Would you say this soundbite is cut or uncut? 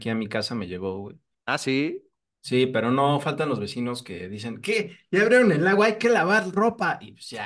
cut